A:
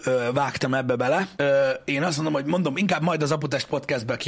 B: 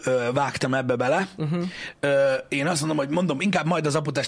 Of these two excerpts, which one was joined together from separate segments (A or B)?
A